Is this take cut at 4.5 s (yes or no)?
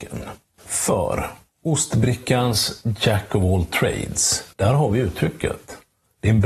yes